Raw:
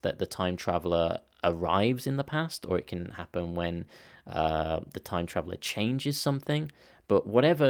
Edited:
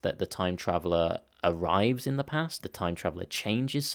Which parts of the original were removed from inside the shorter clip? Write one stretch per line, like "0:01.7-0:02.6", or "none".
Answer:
0:02.6-0:04.9